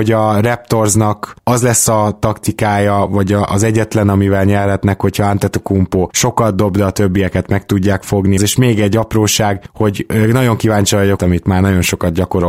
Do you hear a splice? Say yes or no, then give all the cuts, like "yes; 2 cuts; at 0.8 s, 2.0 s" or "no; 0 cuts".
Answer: yes; 2 cuts; at 8.4 s, 11.2 s